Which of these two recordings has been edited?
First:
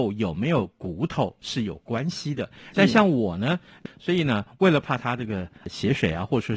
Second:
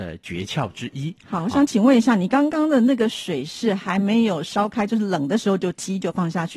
first; 2 cuts; at 2.7 s, 3.9 s

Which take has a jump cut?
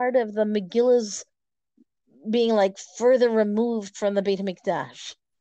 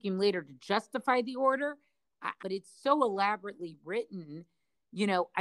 second; 1 cut; at 2.4 s

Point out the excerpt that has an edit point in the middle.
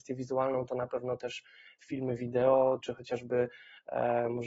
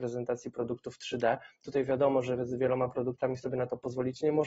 first; 1 cut; at 2.8 s

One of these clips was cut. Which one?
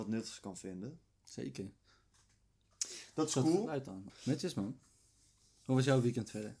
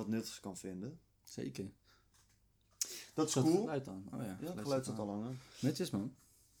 first; 1 cut; at 4.1 s

